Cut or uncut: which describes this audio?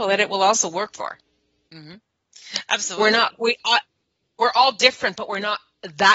uncut